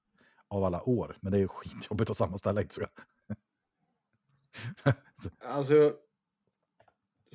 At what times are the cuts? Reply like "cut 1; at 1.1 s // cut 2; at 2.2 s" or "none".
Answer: cut 1; at 5.4 s